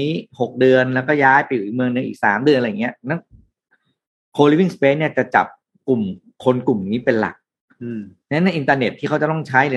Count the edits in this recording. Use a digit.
0